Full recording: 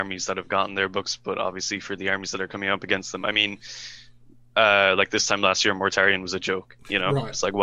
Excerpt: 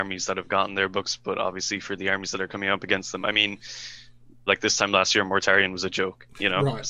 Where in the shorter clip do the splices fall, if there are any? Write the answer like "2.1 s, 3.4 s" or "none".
4.5 s